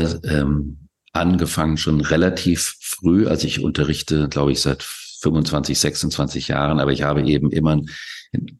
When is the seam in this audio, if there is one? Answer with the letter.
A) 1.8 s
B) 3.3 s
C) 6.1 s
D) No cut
D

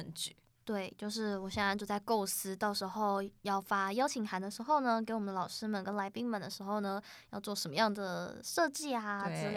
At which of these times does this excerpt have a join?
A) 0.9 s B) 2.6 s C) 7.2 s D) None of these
D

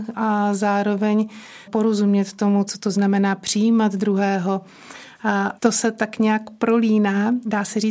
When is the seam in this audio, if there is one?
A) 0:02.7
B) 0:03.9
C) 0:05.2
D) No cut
A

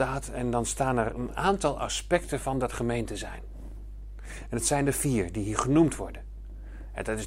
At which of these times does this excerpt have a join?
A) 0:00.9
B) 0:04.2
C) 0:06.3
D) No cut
D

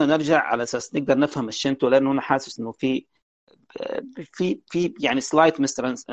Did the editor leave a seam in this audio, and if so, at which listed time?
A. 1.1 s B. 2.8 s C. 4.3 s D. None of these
D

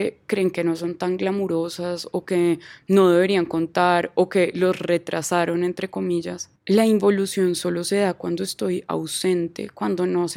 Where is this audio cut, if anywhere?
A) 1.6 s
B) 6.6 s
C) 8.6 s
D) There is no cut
B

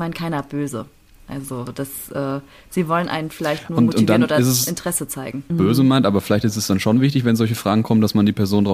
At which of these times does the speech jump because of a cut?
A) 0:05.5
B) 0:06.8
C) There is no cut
A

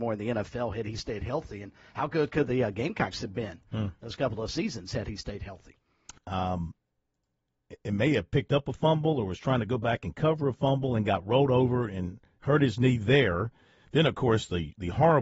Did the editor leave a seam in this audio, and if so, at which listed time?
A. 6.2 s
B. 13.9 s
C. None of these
A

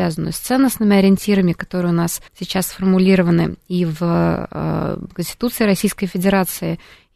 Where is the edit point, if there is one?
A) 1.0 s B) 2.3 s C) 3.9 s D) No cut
B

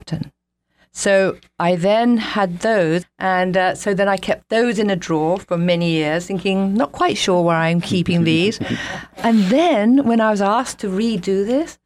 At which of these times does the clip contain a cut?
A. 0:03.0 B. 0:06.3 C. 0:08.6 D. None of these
A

